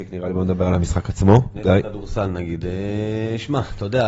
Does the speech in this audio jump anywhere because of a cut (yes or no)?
yes